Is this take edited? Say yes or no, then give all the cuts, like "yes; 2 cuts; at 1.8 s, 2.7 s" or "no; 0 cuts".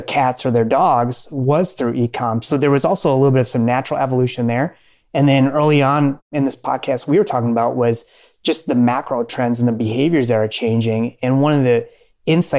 no; 0 cuts